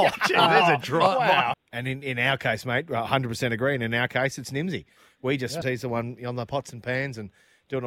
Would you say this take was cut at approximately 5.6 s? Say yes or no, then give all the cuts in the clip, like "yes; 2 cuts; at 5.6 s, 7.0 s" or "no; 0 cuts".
yes; 2 cuts; at 1.5 s, 5.6 s